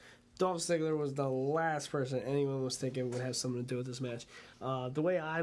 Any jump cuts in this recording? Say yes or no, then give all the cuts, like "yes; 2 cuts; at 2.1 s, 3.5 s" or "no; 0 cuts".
yes; 1 cut; at 4.5 s